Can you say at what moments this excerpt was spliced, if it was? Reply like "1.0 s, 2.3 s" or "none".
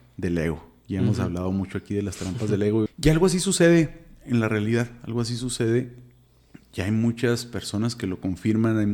2.9 s